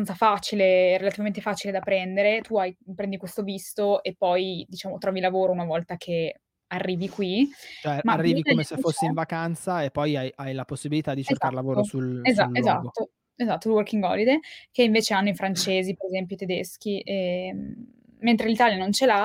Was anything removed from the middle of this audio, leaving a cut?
no; 0 cuts

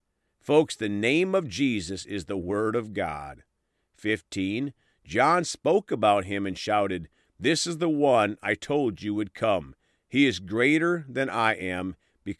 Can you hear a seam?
yes; 1 cut; at 3.8 s

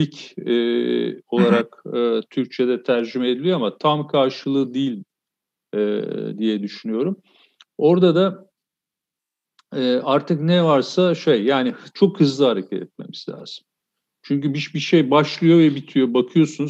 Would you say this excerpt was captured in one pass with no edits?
yes; 0 cuts

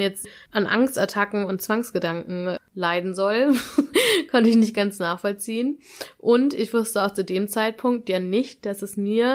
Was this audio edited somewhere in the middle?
no; 0 cuts

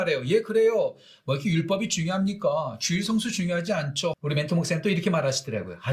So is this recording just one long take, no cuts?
no; 1 cut; at 4.1 s

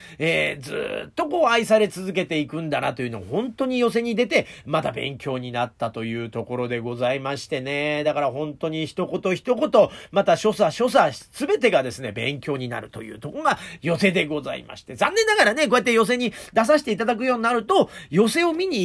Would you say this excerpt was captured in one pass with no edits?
yes; 0 cuts

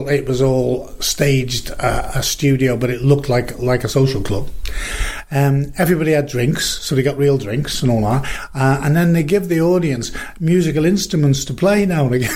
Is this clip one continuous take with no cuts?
yes; 0 cuts

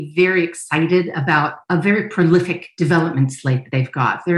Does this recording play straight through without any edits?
yes; 0 cuts

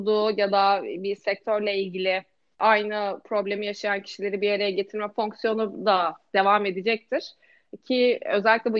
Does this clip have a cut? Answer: no; 0 cuts

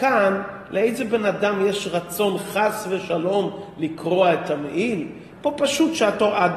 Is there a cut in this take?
yes; 1 cut; at 5.3 s

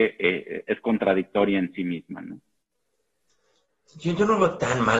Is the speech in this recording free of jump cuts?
yes; 0 cuts

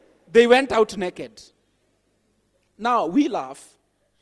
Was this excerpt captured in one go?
yes; 0 cuts

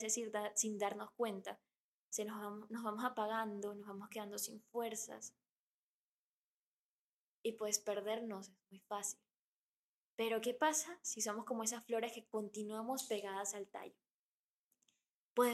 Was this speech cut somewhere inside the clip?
no; 0 cuts

